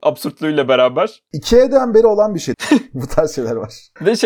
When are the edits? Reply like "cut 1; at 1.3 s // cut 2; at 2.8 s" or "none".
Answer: cut 1; at 2.5 s